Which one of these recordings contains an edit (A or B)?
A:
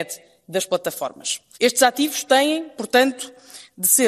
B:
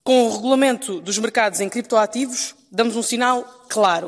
A